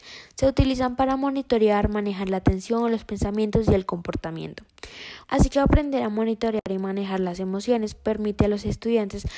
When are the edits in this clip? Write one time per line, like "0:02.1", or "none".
0:05.2